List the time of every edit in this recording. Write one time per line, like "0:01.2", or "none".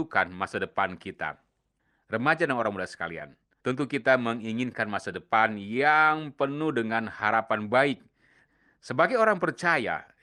0:03.6